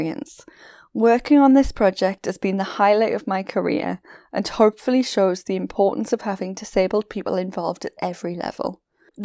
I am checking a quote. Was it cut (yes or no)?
no